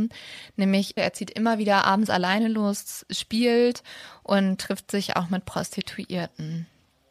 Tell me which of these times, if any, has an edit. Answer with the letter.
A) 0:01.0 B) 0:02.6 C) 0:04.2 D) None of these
A